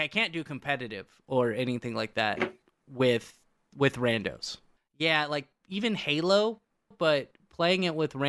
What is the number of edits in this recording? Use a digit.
2